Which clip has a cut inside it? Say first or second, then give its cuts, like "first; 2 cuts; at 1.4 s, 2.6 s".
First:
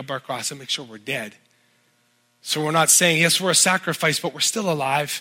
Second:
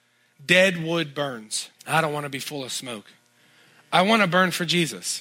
second; 1 cut; at 1.8 s